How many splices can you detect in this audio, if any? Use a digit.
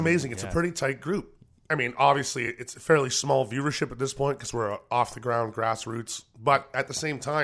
0